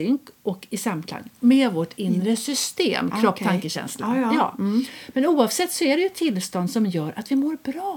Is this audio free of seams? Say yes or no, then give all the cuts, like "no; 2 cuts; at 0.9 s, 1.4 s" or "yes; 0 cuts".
yes; 0 cuts